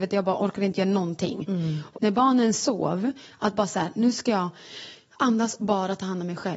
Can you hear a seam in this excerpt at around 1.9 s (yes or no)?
yes